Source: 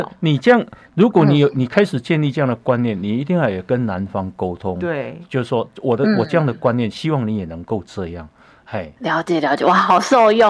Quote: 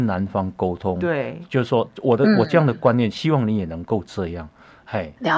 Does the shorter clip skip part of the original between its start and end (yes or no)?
no